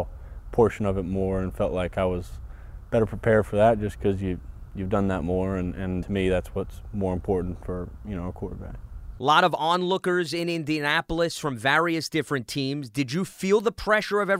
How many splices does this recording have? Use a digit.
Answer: 1